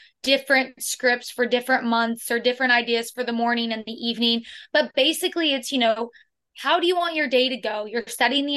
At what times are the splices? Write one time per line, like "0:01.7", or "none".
none